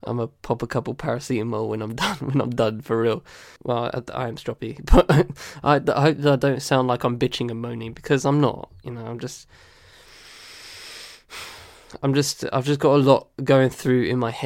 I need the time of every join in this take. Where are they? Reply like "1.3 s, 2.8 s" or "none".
3.6 s